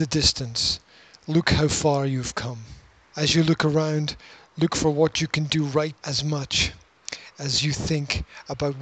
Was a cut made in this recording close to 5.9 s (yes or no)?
yes